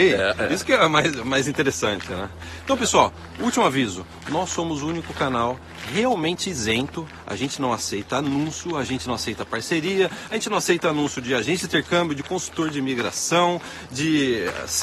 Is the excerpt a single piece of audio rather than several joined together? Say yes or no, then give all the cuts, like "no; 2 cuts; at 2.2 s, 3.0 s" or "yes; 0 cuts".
yes; 0 cuts